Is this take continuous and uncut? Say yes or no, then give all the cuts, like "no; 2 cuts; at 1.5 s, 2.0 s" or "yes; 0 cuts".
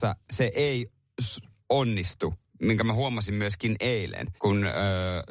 no; 1 cut; at 4.4 s